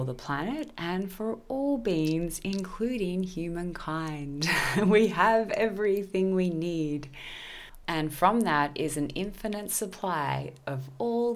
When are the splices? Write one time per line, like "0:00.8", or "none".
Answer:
0:07.8